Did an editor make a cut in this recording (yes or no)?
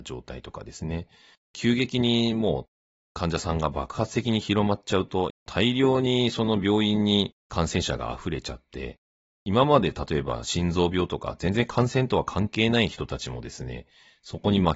yes